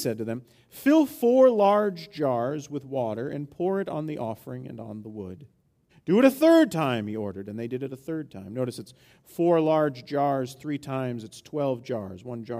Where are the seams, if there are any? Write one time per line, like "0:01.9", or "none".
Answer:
0:05.9